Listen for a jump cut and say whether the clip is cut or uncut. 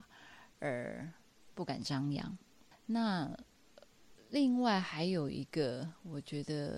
uncut